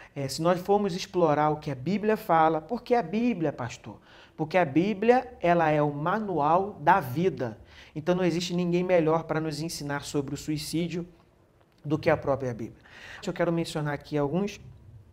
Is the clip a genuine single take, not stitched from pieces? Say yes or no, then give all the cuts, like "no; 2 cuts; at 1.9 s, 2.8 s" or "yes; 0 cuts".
no; 1 cut; at 13.2 s